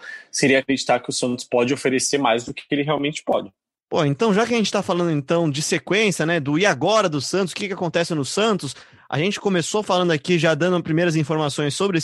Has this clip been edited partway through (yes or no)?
no